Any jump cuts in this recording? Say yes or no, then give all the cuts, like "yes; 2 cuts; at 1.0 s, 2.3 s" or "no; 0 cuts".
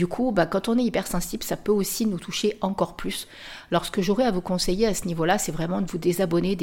no; 0 cuts